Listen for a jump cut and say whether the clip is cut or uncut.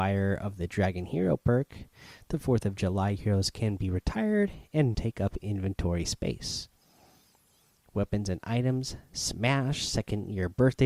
cut